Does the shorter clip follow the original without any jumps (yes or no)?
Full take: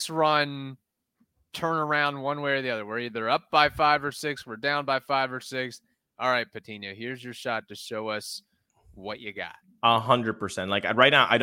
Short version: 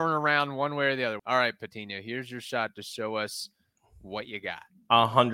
no